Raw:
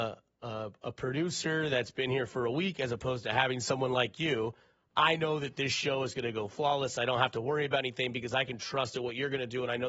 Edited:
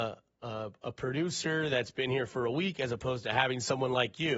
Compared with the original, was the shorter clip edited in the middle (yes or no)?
no